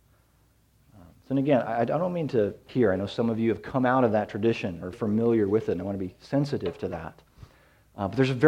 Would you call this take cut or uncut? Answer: cut